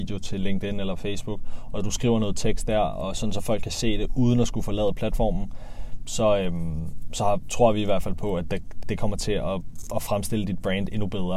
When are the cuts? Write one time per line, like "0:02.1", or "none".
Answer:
0:08.8